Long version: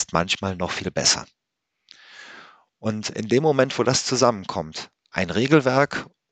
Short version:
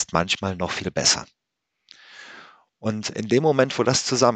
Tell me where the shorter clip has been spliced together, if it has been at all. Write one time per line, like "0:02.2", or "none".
none